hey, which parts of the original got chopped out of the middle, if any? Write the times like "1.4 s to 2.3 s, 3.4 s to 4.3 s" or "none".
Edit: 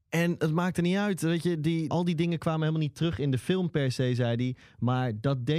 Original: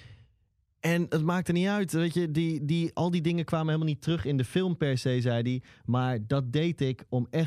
2.6 s to 2.9 s